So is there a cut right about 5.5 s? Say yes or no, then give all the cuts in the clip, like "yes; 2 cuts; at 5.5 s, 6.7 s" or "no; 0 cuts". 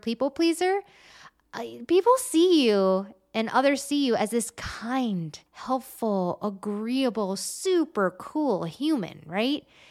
yes; 1 cut; at 5.5 s